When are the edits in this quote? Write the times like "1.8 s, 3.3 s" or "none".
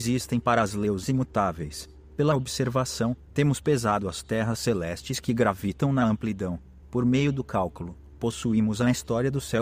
6.8 s